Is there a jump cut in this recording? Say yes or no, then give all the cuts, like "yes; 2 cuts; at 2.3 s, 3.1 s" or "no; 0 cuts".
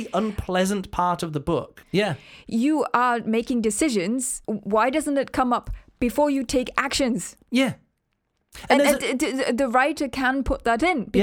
yes; 2 cuts; at 1.8 s, 4.4 s